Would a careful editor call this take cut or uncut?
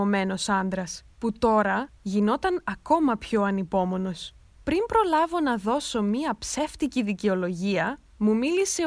uncut